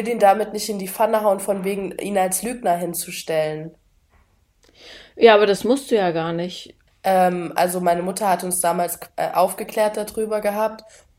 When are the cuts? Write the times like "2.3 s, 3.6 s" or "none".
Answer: 6.9 s

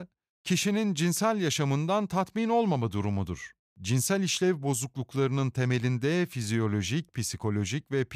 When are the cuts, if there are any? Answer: 7.1 s

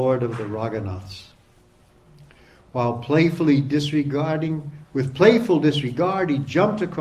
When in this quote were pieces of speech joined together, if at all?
none

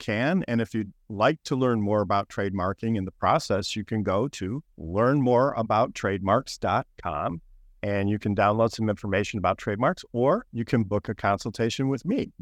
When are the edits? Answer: none

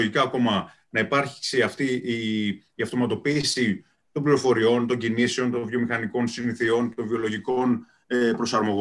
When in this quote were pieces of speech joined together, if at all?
none

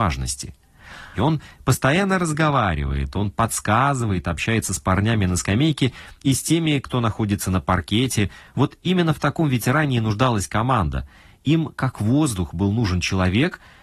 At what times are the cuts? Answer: 1.1 s

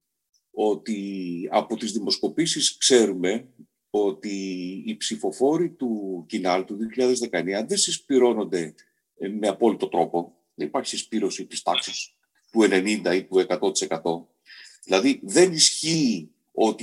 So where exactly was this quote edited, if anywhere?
none

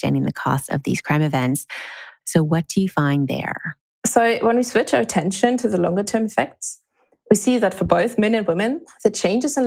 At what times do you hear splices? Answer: 2.2 s

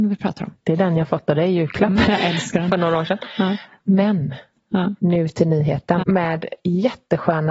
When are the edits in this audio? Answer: 2.0 s, 6.0 s

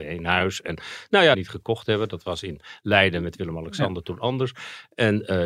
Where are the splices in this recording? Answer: 1.3 s

